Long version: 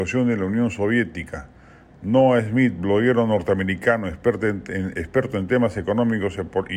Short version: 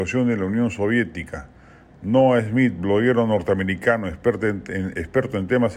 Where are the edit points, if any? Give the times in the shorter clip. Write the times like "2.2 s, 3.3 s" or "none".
none